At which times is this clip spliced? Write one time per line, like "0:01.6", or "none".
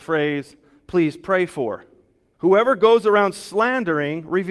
0:02.3